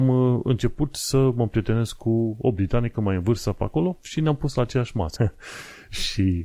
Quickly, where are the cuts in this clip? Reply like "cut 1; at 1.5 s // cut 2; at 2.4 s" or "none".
cut 1; at 5.2 s